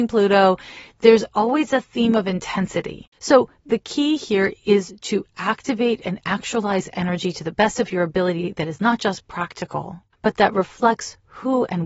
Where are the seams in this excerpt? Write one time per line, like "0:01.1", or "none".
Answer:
0:03.1
0:10.1